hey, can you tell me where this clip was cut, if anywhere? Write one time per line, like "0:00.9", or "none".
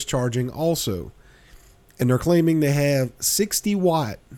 none